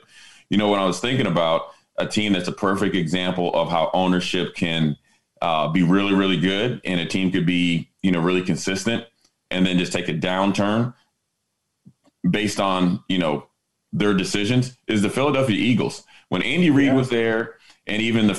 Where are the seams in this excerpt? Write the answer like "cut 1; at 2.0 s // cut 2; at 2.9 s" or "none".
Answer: none